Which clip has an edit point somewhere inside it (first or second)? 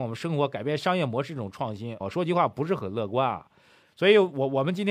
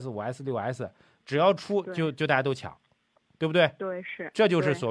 first